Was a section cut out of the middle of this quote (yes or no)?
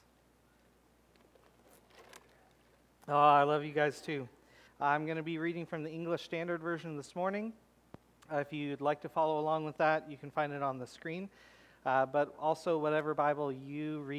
yes